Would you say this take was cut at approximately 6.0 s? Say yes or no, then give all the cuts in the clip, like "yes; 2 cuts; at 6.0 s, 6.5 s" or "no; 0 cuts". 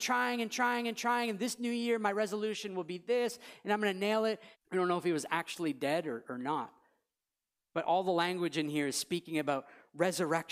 no; 1 cut; at 4.5 s